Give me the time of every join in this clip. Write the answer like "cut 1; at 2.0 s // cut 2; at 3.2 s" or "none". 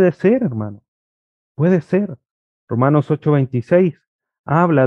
cut 1; at 2.5 s